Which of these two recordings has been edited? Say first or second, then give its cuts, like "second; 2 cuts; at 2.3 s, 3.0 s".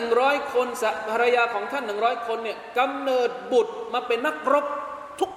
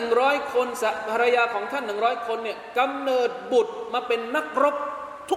first; 1 cut; at 4.2 s